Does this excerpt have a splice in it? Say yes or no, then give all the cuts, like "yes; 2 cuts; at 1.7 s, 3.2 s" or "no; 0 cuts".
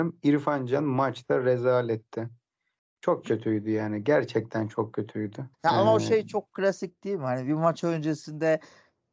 yes; 1 cut; at 5.5 s